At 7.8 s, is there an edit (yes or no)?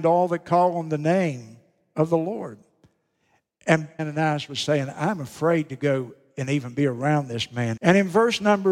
yes